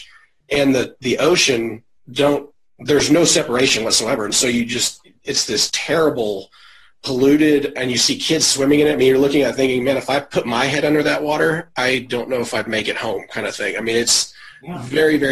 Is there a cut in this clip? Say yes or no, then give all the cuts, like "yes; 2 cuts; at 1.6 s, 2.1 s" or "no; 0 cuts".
yes; 1 cut; at 5.7 s